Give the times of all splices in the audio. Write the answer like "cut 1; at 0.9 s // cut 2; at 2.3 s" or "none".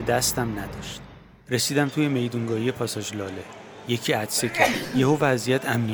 none